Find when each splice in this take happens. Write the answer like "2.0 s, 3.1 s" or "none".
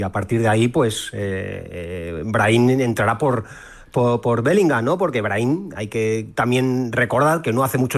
none